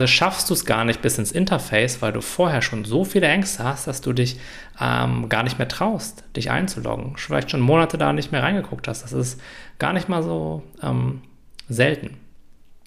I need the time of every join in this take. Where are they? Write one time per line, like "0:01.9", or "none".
none